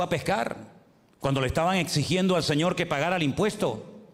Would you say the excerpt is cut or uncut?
uncut